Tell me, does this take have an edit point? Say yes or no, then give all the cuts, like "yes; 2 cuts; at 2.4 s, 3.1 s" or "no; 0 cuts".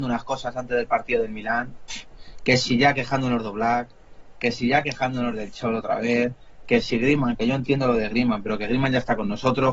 yes; 1 cut; at 7.4 s